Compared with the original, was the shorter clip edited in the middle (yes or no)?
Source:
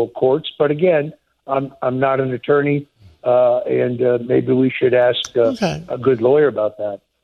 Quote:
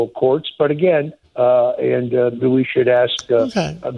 yes